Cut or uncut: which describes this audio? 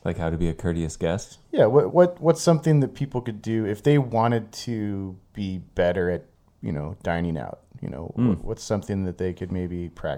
cut